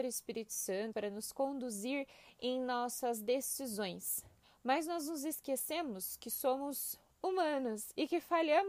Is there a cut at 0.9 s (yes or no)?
yes